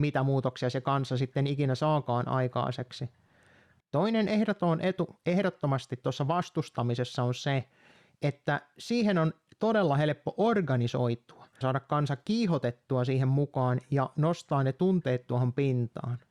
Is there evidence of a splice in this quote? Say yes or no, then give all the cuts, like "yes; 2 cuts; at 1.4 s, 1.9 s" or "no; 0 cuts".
yes; 2 cuts; at 3.8 s, 11.6 s